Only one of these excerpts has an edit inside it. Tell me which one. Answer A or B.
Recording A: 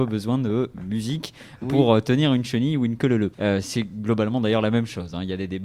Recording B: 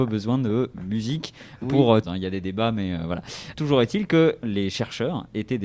B